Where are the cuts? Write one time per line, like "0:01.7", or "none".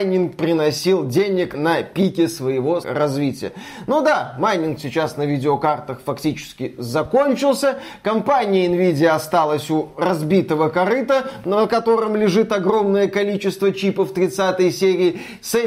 0:02.8